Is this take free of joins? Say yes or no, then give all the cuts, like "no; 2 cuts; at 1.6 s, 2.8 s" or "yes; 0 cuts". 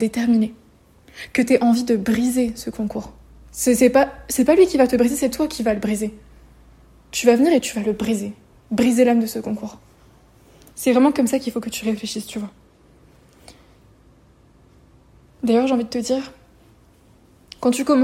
yes; 0 cuts